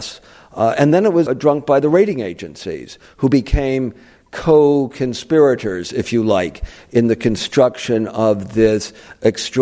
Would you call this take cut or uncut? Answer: cut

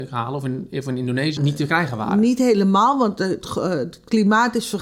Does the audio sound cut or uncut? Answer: cut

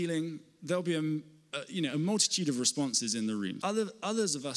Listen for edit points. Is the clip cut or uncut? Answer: cut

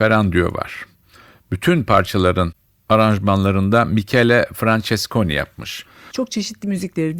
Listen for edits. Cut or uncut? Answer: cut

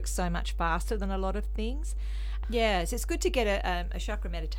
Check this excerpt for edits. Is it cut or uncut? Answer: cut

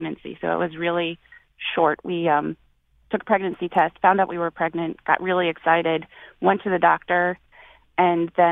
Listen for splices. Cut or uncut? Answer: uncut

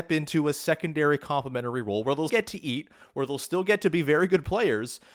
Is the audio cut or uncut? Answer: cut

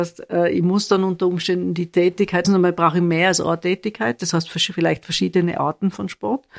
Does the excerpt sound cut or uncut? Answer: cut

